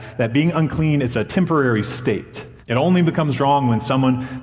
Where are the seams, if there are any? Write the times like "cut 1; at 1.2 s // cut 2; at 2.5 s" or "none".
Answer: cut 1; at 2.6 s